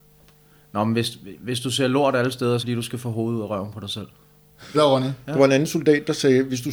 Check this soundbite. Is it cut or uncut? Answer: cut